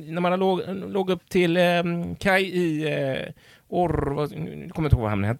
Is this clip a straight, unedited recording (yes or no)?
yes